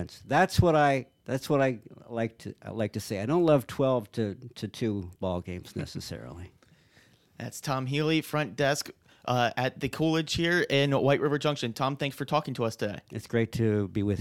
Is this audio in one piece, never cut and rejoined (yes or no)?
yes